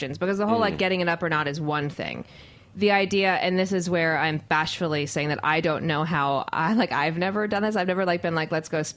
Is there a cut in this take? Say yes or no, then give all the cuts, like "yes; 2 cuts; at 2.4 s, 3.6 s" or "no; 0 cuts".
no; 0 cuts